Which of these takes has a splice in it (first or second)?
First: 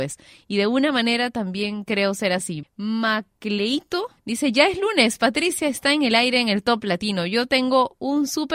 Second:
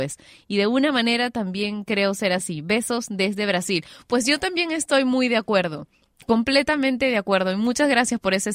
first